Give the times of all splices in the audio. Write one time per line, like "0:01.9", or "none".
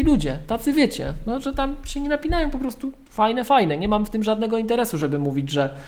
none